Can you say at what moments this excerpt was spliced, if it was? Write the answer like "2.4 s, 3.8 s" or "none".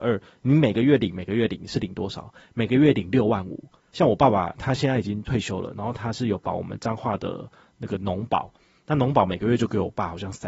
3.8 s